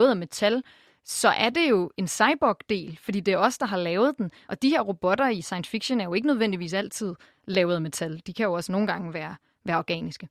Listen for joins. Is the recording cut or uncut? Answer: uncut